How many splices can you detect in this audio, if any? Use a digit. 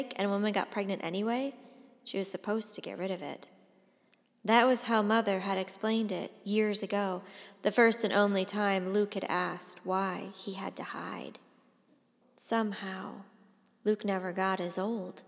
1